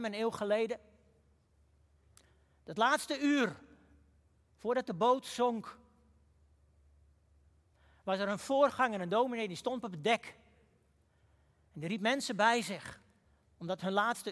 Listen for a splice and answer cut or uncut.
uncut